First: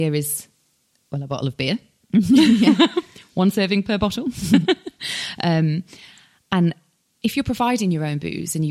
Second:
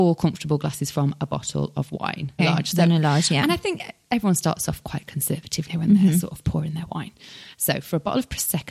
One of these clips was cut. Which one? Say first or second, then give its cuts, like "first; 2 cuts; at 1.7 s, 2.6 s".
second; 3 cuts; at 2.4 s, 5.7 s, 7.5 s